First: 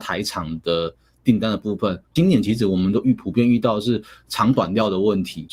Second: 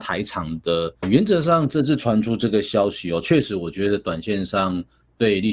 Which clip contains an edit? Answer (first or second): second